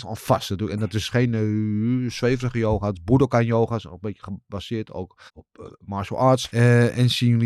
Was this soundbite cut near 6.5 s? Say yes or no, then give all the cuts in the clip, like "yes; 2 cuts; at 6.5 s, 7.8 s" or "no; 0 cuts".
yes; 2 cuts; at 5.3 s, 6.5 s